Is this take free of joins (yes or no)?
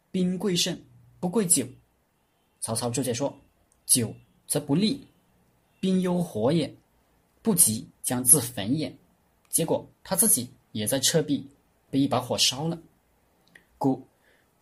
yes